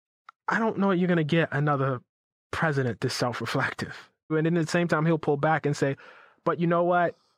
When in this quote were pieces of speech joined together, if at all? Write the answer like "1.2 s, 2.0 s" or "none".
4.3 s